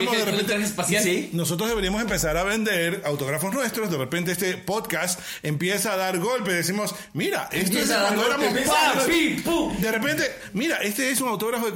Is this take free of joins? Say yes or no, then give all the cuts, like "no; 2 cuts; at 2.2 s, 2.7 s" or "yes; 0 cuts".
yes; 0 cuts